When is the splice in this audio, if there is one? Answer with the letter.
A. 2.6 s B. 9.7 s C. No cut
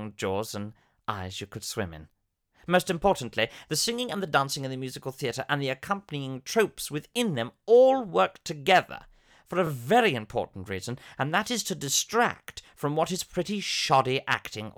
C